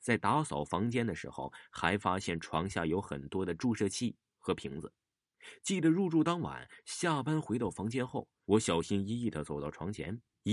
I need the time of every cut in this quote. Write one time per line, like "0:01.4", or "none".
0:08.4